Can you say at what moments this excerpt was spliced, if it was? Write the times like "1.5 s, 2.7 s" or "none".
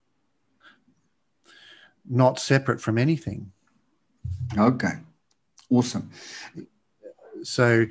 6.5 s